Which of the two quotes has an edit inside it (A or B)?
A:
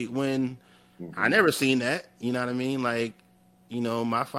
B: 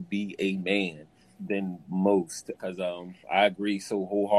B